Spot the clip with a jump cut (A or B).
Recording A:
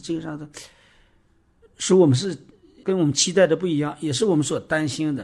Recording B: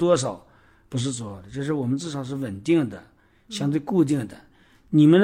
A